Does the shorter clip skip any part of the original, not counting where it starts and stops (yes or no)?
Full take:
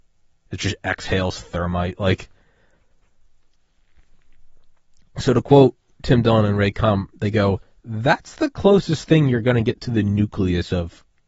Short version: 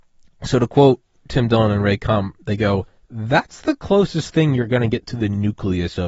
no